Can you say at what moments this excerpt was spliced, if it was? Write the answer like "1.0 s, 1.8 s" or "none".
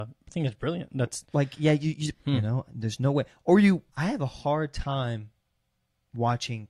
2.1 s, 3.9 s

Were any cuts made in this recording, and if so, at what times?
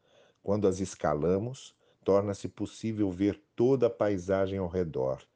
1.9 s

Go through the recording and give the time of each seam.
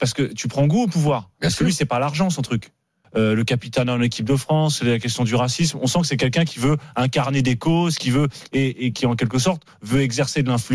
3.0 s

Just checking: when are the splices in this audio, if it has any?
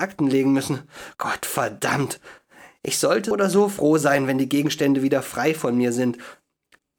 3.3 s

